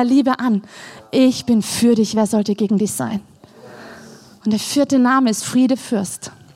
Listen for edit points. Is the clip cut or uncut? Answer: uncut